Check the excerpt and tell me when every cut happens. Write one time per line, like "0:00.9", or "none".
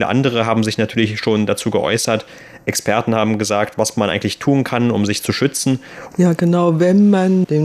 0:06.1